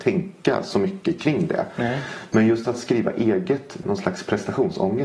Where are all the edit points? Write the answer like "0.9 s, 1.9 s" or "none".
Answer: 3.8 s